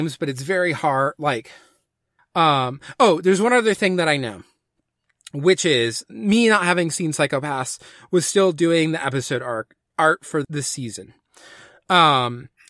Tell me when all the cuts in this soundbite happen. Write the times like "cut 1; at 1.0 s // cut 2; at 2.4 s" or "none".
cut 1; at 2.2 s // cut 2; at 10.4 s